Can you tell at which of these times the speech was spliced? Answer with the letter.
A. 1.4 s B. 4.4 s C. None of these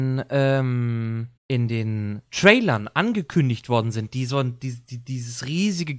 A